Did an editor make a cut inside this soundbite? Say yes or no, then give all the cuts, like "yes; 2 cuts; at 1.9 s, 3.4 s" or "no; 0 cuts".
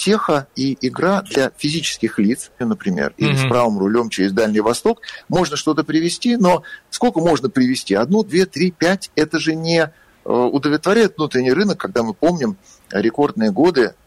yes; 1 cut; at 2.6 s